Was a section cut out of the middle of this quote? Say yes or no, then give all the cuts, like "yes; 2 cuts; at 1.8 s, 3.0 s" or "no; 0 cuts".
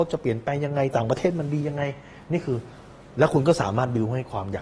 no; 0 cuts